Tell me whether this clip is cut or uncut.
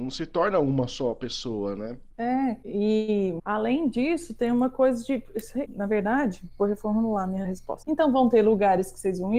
cut